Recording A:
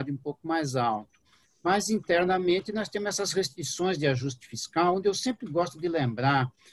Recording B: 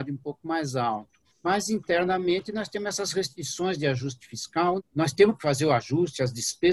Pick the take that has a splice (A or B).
B